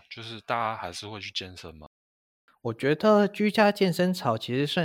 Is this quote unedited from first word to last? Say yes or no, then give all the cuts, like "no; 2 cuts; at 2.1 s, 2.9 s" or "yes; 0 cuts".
yes; 0 cuts